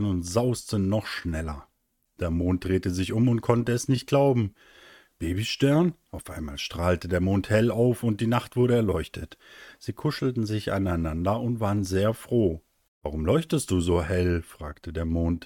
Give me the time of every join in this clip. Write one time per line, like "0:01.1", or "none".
none